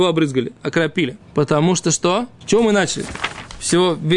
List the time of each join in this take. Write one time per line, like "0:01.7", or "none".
0:01.2
0:02.4